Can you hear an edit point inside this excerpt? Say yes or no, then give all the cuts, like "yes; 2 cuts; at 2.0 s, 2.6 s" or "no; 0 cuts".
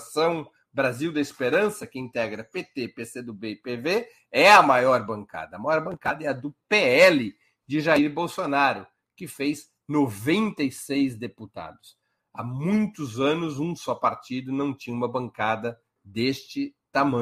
no; 0 cuts